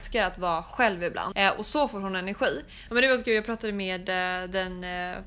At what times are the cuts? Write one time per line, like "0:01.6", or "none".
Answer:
0:01.3
0:02.9